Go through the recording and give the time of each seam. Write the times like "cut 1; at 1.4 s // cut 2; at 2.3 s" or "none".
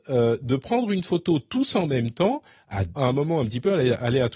cut 1; at 3.0 s